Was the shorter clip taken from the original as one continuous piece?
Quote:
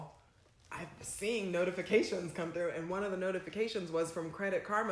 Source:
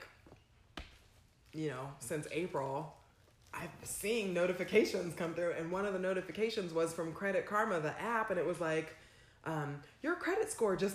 yes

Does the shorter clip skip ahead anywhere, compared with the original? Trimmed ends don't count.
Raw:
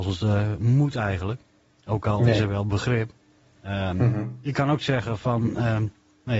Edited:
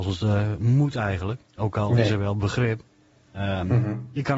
yes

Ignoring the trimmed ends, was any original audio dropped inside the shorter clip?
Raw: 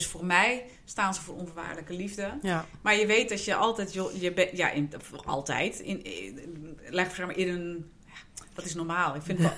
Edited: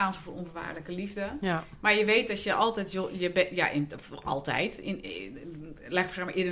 no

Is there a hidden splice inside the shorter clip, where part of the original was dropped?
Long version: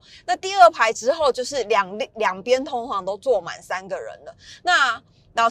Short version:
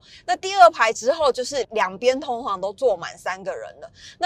yes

